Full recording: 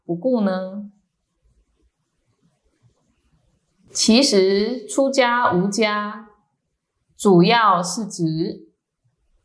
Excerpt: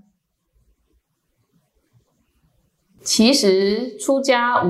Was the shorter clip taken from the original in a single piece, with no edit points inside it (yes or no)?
yes